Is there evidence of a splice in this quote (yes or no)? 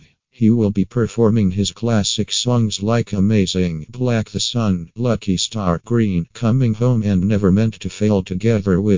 no